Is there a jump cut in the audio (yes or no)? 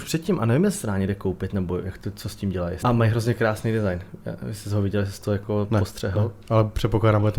yes